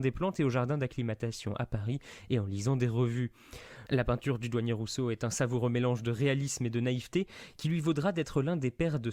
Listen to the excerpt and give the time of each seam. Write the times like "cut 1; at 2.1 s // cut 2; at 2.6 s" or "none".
none